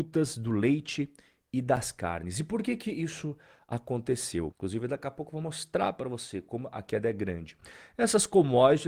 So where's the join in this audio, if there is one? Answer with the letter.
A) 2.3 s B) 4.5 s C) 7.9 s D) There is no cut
B